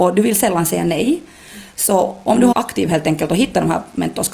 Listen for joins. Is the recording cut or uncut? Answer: cut